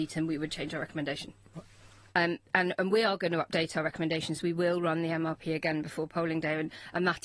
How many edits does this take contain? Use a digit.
1